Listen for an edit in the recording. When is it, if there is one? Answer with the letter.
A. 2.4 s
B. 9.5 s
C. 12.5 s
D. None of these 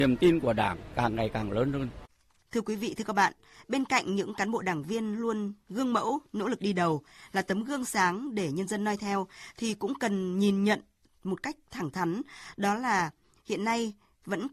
A